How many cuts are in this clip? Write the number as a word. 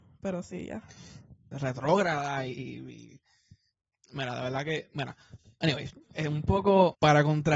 two